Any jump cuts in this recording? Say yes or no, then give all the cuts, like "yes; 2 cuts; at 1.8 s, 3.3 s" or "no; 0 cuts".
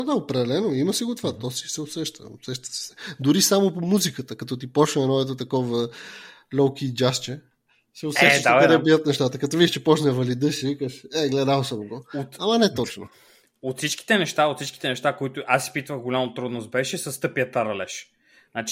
no; 0 cuts